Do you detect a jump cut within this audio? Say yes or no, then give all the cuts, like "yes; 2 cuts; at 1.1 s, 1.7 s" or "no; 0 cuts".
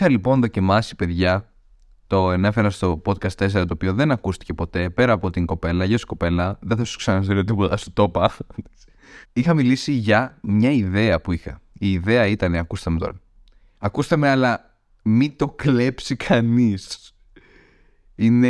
no; 0 cuts